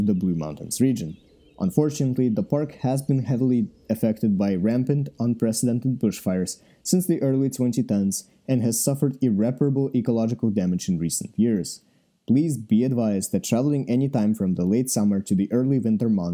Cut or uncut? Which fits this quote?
uncut